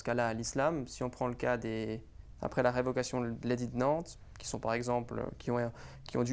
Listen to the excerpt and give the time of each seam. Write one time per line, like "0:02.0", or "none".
0:02.4